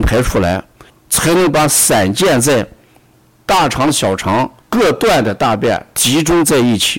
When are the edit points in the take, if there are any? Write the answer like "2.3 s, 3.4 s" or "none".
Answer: 0.9 s, 4.6 s